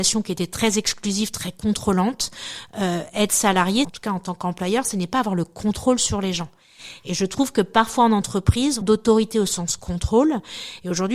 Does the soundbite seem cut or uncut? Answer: cut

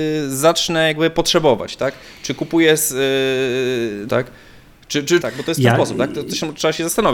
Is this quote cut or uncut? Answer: cut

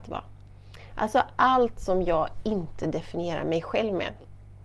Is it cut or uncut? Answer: uncut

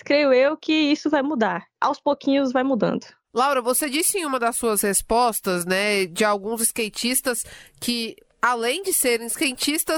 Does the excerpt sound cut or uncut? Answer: uncut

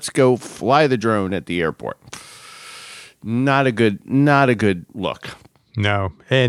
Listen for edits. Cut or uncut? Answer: uncut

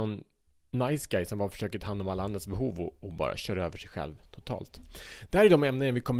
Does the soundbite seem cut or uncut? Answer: uncut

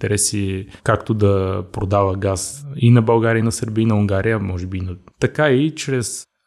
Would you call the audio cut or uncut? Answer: cut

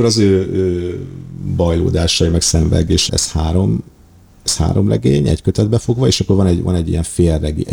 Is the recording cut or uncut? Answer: cut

